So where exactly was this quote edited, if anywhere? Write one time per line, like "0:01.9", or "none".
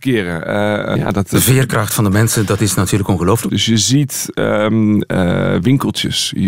0:00.9
0:03.5